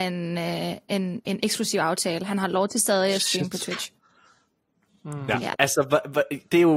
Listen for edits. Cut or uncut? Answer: cut